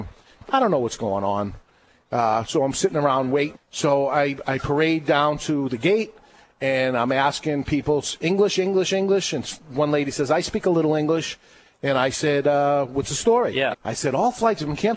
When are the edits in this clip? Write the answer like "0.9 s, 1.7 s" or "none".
3.5 s, 13.7 s